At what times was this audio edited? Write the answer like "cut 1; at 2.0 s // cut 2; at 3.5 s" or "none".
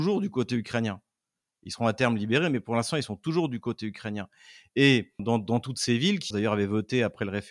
cut 1; at 5.2 s // cut 2; at 6.3 s